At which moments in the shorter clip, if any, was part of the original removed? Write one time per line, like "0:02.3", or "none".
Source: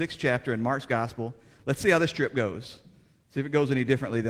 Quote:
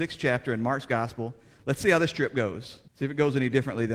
0:02.9